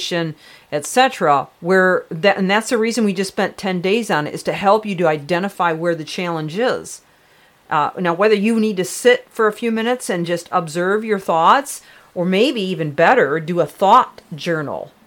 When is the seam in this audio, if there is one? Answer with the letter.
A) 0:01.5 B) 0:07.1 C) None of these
A